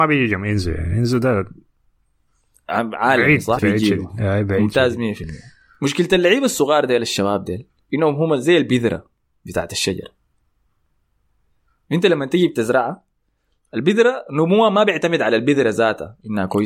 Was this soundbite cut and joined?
yes; 1 cut; at 3.6 s

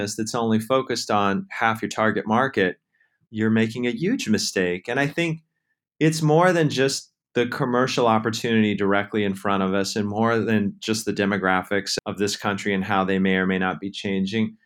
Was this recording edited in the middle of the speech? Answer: yes; 1 cut; at 3.3 s

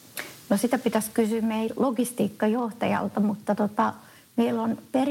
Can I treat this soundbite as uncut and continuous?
yes; 0 cuts

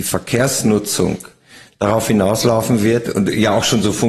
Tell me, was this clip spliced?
no; 0 cuts

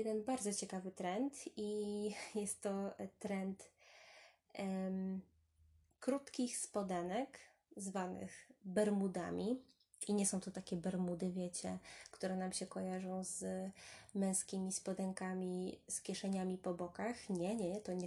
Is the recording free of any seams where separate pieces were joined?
yes; 0 cuts

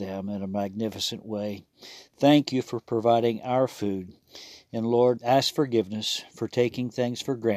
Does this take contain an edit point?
yes; 1 cut; at 5.2 s

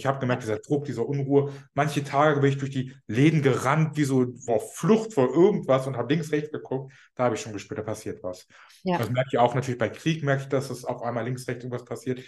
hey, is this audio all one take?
no; 1 cut; at 4.5 s

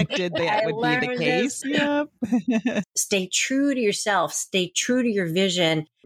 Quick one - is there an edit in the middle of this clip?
yes; 2 cuts; at 1.6 s, 2.8 s

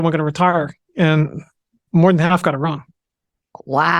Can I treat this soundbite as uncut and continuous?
yes; 0 cuts

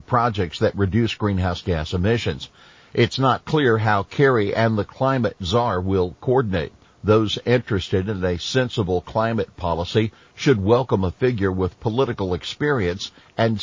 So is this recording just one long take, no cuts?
no; 1 cut; at 6.8 s

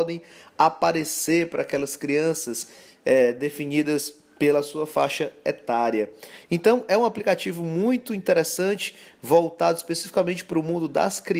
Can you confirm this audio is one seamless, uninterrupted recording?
yes; 0 cuts

